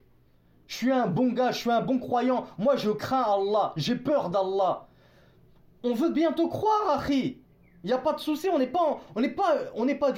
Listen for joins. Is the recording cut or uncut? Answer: uncut